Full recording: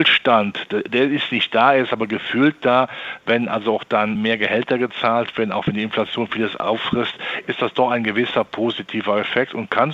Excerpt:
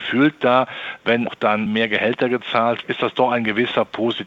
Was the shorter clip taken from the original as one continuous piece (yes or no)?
no